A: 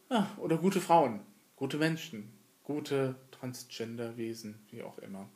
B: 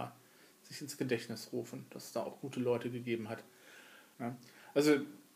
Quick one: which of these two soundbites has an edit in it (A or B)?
B